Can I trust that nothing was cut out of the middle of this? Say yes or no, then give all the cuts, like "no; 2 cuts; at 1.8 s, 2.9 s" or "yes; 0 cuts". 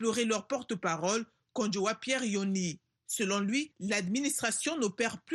yes; 0 cuts